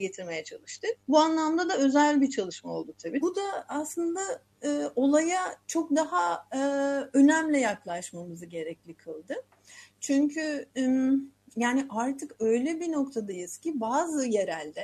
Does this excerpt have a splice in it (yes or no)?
yes